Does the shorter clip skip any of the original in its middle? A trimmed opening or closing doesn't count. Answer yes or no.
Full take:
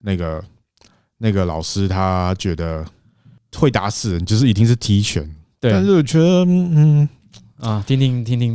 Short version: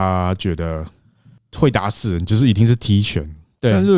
no